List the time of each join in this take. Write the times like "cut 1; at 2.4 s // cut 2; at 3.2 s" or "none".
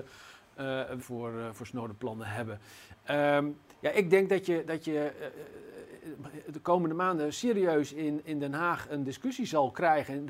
cut 1; at 1.0 s